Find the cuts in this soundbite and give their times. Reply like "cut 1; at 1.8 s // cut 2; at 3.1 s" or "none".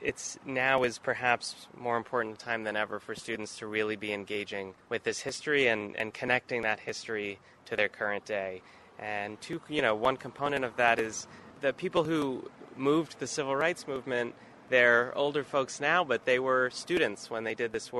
none